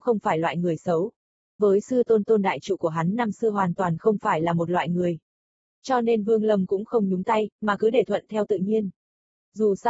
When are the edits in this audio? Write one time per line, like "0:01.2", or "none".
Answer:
0:01.6